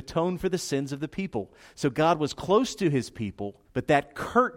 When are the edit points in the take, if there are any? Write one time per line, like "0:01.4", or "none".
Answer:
0:03.6